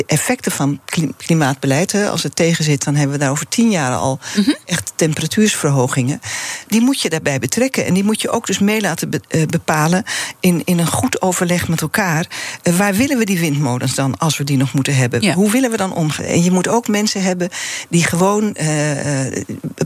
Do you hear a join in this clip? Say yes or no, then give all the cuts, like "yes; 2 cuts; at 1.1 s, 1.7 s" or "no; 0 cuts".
yes; 2 cuts; at 6.7 s, 16.2 s